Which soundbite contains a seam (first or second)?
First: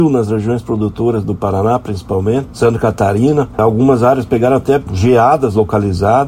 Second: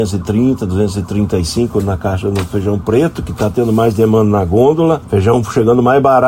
first